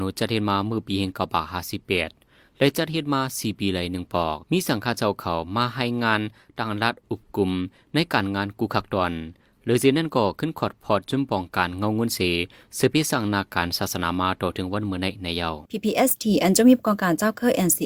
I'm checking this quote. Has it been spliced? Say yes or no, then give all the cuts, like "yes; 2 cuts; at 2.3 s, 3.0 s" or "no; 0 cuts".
yes; 2 cuts; at 4.4 s, 15.6 s